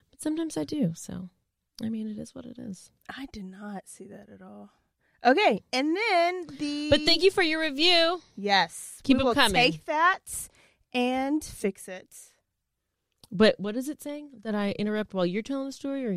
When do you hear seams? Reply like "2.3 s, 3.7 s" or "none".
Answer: none